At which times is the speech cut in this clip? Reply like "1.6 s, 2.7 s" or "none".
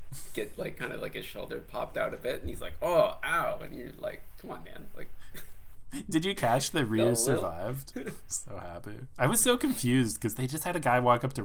7.9 s